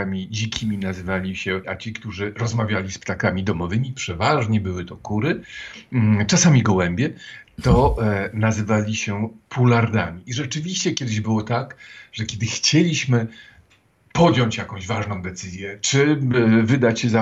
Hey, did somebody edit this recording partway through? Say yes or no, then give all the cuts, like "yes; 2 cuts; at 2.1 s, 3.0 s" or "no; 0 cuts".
yes; 1 cut; at 1.6 s